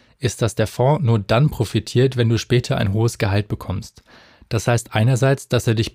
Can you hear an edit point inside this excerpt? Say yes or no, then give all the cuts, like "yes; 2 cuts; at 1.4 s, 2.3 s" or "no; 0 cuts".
no; 0 cuts